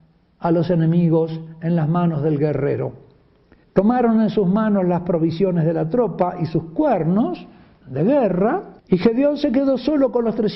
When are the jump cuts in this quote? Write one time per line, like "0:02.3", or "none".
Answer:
0:03.6
0:08.8